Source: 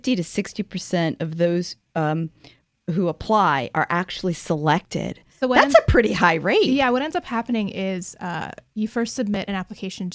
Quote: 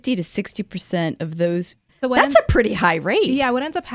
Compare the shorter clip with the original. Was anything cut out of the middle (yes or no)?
yes